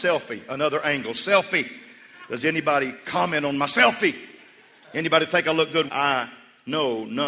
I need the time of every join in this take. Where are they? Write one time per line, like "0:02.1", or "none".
0:05.9